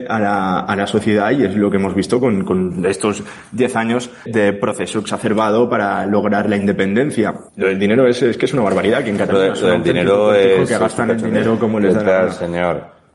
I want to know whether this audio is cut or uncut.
cut